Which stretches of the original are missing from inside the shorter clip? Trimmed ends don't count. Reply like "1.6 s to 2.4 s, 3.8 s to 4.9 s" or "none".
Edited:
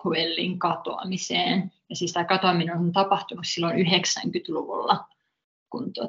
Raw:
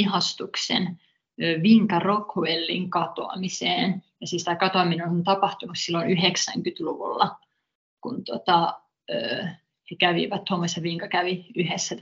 none